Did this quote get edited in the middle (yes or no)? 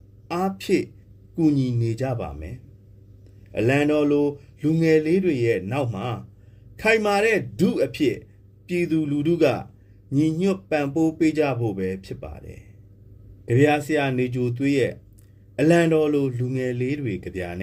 yes